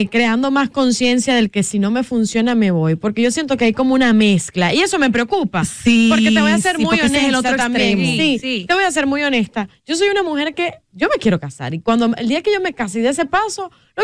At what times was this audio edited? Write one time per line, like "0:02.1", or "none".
none